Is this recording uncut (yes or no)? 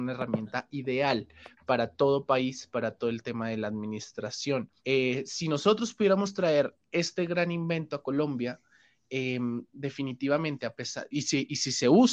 no